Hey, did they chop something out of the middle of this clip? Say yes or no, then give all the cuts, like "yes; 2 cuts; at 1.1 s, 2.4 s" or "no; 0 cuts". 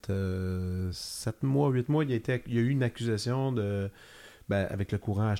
no; 0 cuts